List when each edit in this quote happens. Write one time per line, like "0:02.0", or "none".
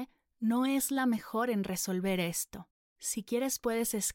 0:02.8